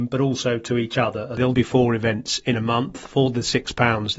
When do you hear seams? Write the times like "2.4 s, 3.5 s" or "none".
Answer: 1.5 s